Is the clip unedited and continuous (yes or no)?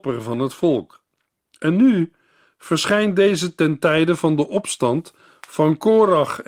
yes